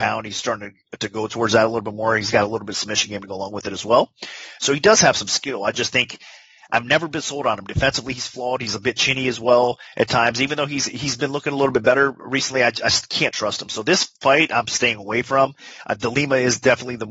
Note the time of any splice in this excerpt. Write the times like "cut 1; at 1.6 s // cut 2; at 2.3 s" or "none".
none